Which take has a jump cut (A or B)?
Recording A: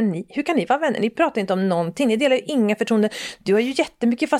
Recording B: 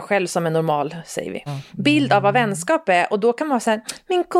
B